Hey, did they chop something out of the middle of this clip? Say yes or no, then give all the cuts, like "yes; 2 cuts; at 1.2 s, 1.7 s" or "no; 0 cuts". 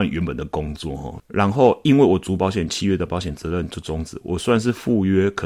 yes; 1 cut; at 1.2 s